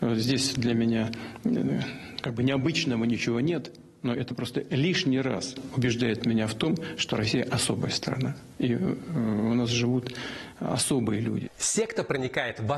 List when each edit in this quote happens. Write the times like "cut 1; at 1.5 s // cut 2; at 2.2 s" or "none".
none